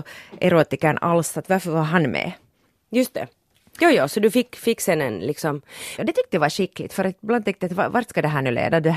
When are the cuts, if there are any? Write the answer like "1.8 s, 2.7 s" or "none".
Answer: 2.8 s, 6.0 s